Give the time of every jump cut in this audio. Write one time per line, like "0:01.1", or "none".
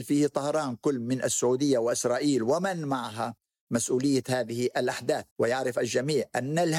0:05.3